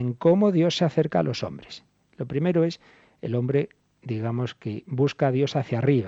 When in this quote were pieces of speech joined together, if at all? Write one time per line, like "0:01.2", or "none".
none